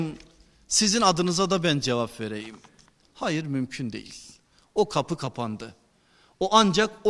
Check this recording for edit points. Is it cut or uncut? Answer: cut